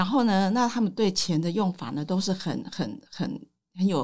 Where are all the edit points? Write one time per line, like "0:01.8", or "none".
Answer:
none